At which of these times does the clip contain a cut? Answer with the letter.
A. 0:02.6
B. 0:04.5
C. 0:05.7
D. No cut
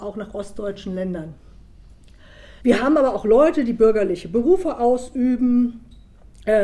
A